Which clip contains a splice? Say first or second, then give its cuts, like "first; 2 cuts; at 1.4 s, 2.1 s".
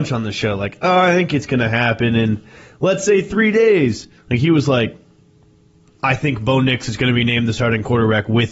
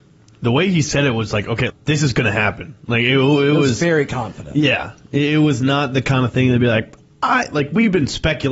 second; 1 cut; at 1.7 s